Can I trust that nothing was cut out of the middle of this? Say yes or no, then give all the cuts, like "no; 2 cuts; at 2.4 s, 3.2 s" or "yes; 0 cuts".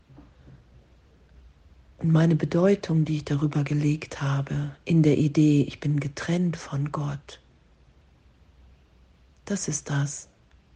yes; 0 cuts